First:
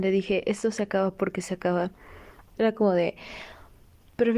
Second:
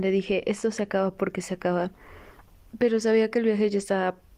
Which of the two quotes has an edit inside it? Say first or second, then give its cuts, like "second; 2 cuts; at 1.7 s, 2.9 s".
first; 1 cut; at 2.6 s